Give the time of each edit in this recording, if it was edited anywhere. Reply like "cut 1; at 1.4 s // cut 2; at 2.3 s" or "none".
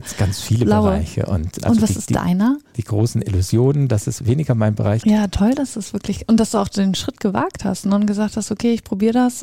cut 1; at 1.6 s // cut 2; at 5.0 s